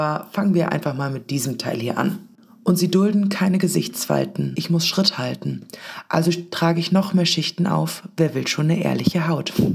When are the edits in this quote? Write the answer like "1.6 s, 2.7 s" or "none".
4.5 s